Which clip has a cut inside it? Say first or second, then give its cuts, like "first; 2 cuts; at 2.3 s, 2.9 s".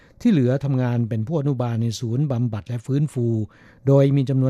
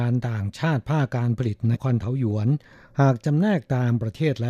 second; 1 cut; at 1.7 s